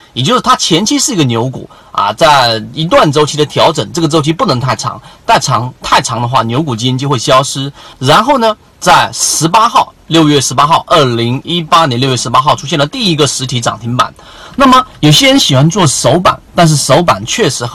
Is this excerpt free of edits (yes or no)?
no